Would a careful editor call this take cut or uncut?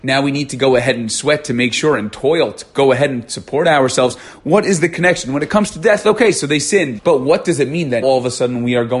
cut